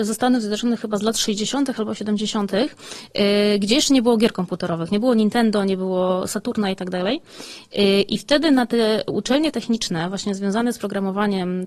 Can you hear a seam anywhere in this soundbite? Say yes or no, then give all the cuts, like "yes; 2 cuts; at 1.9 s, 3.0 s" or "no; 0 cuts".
no; 0 cuts